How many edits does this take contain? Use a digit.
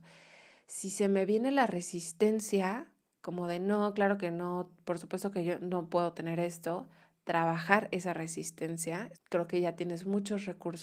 1